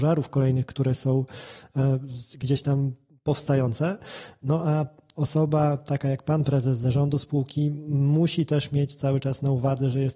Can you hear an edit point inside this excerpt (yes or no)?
no